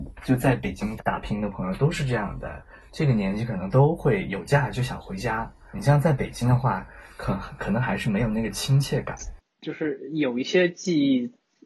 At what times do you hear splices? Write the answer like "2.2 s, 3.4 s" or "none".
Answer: 1.0 s